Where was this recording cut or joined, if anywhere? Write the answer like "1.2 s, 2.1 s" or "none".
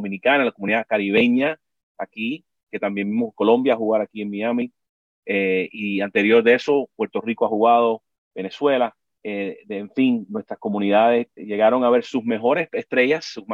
11.4 s